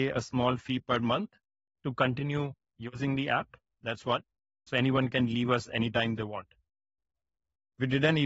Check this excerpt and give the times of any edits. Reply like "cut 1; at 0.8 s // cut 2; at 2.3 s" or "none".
cut 1; at 4.7 s